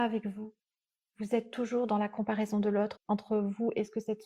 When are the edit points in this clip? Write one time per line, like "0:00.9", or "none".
0:03.0